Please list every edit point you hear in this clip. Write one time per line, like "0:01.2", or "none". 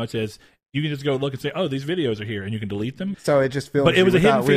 0:03.1